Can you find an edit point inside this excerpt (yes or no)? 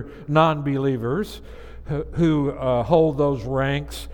no